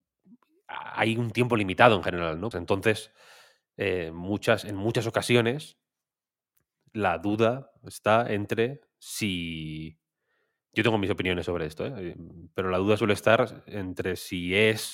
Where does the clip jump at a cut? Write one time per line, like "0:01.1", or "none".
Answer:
0:02.5